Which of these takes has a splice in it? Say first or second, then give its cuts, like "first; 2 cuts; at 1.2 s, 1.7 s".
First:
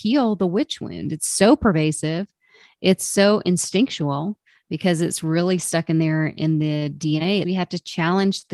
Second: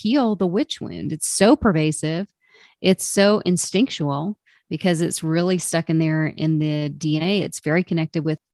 first; 1 cut; at 7.4 s